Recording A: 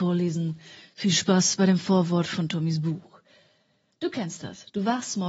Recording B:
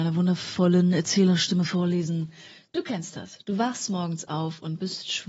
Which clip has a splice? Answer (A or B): B